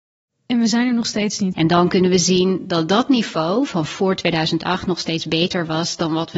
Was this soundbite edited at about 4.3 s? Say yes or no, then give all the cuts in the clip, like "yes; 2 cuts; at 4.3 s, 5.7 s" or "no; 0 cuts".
no; 1 cut; at 1.5 s